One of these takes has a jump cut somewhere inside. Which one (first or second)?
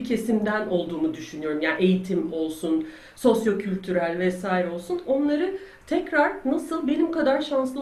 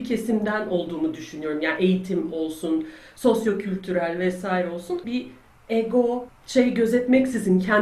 second